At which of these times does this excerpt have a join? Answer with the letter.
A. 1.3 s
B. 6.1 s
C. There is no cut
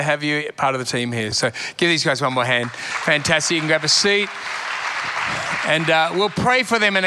A